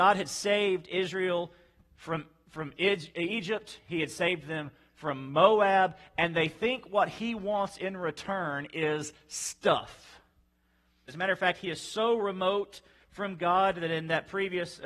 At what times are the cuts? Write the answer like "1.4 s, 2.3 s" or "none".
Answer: 11.1 s

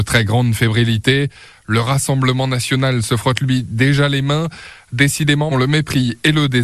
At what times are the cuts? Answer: 5.5 s

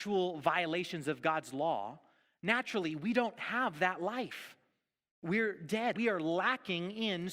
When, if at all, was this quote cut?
5.9 s

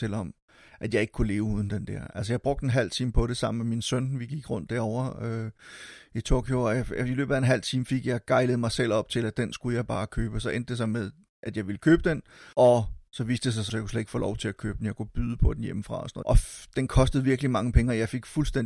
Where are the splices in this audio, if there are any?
12.5 s, 13.7 s, 16.2 s

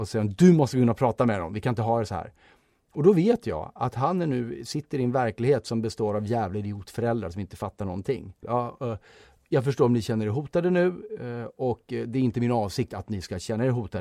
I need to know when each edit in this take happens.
8.4 s

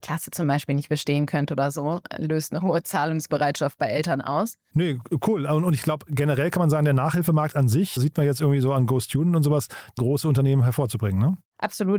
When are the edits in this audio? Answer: 4.7 s, 8.0 s, 10.0 s

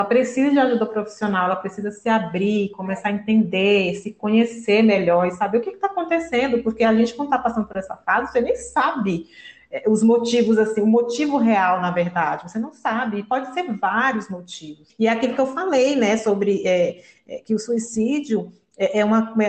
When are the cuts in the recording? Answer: none

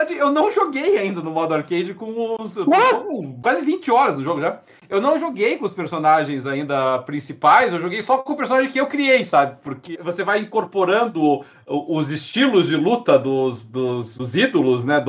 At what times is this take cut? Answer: 9.9 s

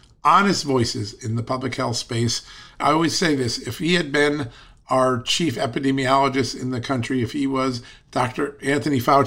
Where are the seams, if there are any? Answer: none

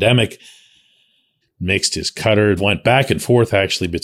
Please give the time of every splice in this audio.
1.4 s, 2.6 s

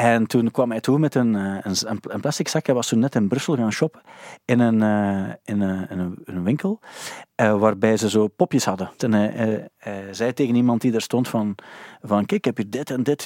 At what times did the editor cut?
9.0 s

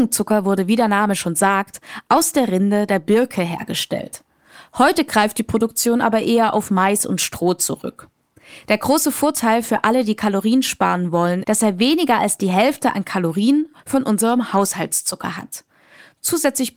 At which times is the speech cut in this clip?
11.4 s

